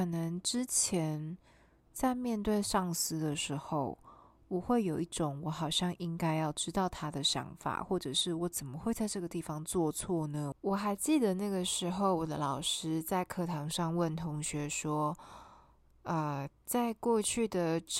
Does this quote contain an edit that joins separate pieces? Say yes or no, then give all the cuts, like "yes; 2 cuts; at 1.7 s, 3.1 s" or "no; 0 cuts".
yes; 1 cut; at 10.5 s